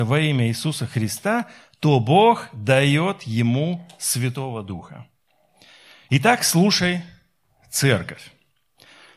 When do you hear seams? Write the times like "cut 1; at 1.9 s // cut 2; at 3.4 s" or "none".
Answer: none